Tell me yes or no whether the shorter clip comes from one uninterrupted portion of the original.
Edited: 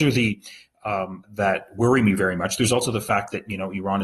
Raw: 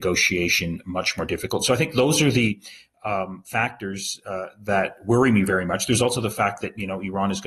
no